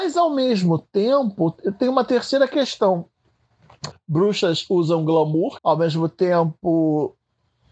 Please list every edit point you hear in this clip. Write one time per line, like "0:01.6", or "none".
0:03.9
0:05.6

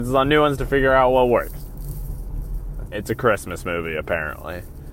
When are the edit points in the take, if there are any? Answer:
0:02.9

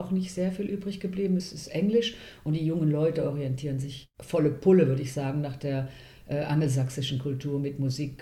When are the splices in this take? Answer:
none

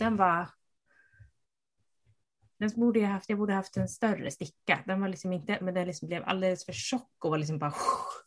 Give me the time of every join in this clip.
0:05.6

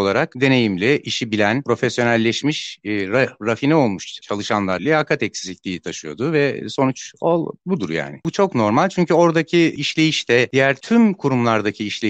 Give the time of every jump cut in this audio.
0:04.8
0:08.2

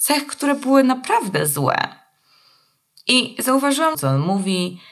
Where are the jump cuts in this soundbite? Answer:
0:03.9

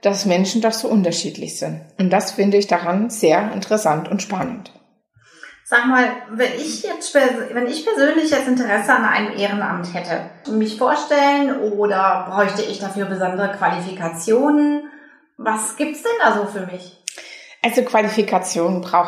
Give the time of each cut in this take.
0:10.5

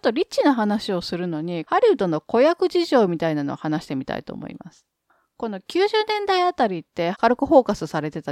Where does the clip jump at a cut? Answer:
0:01.6
0:07.1

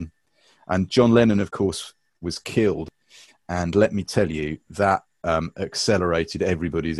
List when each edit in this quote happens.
none

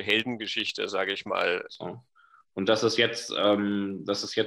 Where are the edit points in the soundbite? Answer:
0:01.7

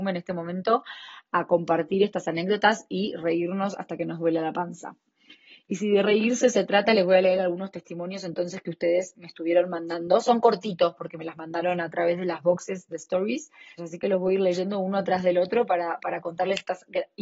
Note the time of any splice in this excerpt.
0:13.8

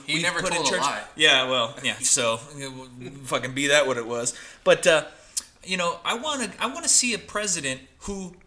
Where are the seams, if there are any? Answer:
0:02.0

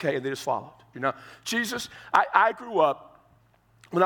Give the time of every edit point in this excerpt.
0:00.9

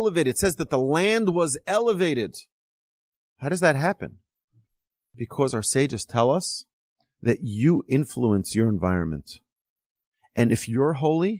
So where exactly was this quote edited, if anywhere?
none

